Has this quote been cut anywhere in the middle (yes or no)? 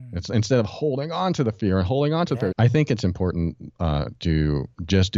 yes